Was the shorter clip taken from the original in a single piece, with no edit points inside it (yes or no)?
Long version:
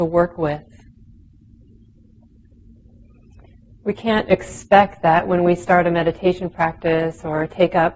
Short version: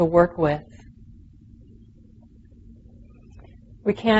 yes